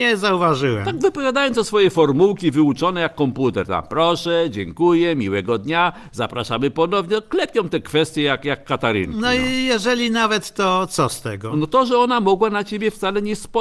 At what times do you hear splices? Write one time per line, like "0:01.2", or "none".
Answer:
none